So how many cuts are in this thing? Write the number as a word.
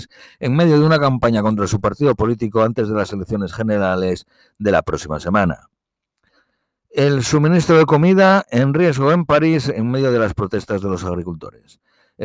zero